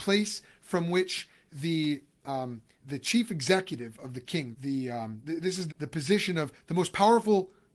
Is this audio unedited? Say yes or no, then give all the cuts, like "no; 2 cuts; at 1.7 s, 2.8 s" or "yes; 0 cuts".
no; 2 cuts; at 4.5 s, 5.7 s